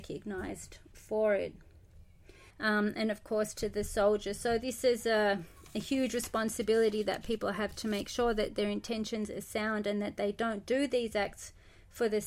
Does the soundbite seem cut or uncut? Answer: cut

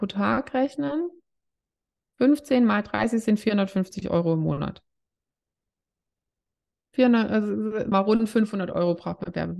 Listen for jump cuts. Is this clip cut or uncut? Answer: cut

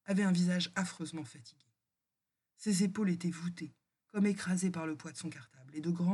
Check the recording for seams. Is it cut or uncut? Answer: uncut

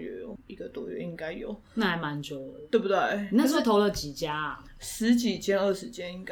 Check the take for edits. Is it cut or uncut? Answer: uncut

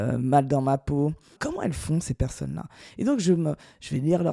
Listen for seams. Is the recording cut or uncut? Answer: cut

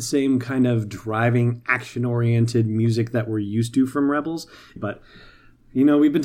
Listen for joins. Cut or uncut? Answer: cut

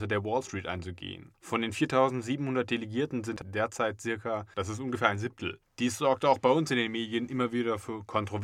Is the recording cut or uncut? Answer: cut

